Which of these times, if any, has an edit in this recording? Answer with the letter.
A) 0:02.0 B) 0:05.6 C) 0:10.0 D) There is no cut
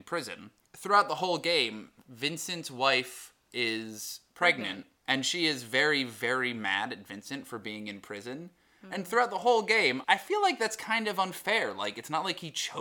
C